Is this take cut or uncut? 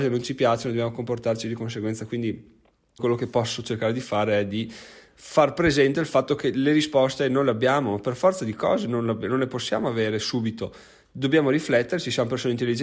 cut